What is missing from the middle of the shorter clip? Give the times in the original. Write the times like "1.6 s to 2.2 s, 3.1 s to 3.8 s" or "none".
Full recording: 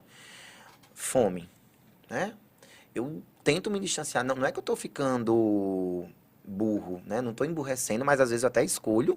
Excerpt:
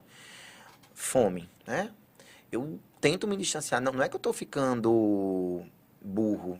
1.6 s to 2.0 s